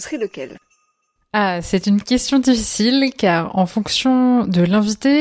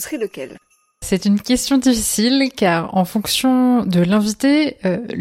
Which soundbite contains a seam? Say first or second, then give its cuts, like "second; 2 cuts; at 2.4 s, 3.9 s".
second; 1 cut; at 1.0 s